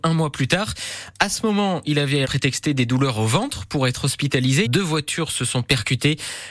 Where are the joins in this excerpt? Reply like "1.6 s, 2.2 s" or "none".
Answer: 2.2 s, 4.7 s